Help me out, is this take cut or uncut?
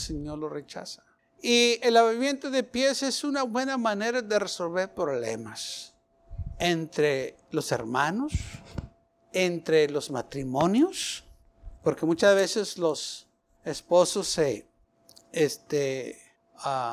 cut